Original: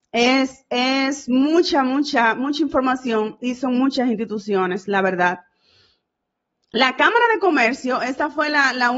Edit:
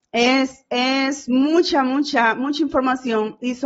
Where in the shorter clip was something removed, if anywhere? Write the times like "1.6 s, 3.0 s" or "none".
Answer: none